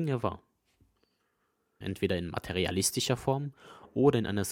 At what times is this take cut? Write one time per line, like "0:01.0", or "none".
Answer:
0:01.8